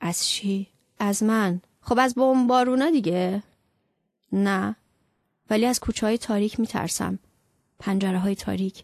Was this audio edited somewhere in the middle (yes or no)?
yes